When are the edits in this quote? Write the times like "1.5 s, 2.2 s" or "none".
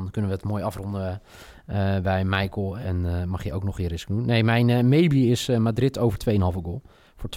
none